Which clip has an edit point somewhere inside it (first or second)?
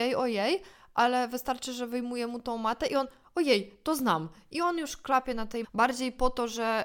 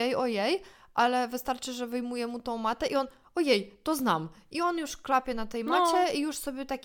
first